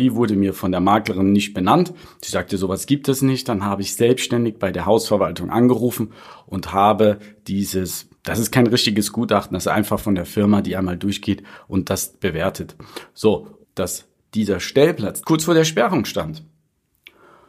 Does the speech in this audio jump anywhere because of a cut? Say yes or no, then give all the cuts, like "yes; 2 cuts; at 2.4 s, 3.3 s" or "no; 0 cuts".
yes; 2 cuts; at 13.6 s, 15.2 s